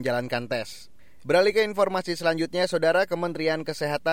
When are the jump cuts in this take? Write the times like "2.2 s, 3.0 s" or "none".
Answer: 1.2 s